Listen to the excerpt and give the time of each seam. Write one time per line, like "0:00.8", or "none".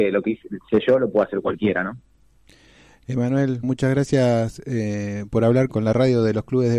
0:03.6
0:05.7